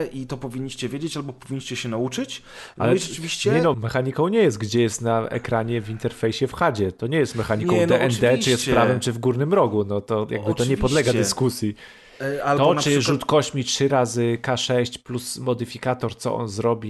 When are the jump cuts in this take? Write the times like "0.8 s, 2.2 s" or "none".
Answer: 3.7 s